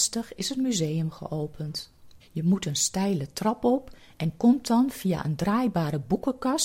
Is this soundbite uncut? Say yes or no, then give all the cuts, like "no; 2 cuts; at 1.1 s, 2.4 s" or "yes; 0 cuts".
no; 1 cut; at 2.2 s